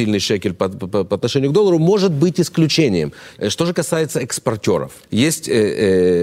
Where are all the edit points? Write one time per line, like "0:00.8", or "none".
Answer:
0:03.4
0:05.0